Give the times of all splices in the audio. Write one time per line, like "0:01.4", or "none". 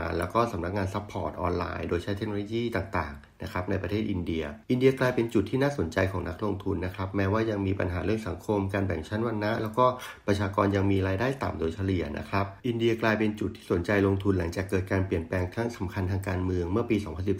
0:04.6
0:12.6